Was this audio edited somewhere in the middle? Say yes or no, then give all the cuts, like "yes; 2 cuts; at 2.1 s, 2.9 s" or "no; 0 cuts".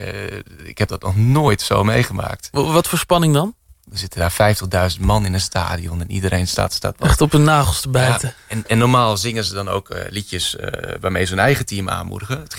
yes; 1 cut; at 3.8 s